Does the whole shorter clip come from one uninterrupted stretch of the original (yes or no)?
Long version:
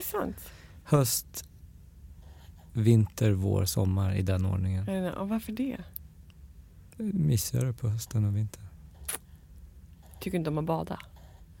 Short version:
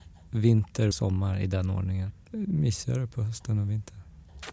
no